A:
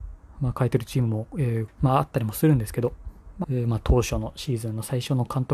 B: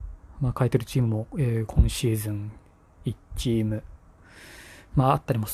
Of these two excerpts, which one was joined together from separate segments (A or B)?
A